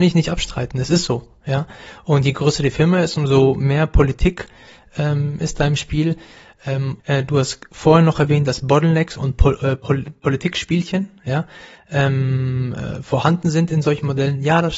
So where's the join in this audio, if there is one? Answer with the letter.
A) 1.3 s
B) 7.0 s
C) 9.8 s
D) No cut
B